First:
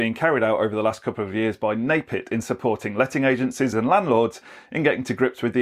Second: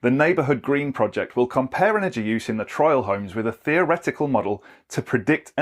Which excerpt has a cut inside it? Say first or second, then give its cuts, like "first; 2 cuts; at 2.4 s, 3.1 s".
first; 1 cut; at 3.7 s